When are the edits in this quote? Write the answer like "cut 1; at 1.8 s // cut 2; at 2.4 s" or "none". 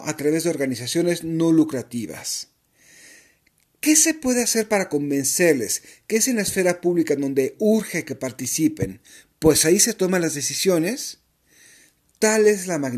none